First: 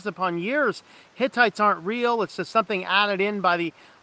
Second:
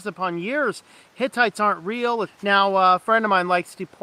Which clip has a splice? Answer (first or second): second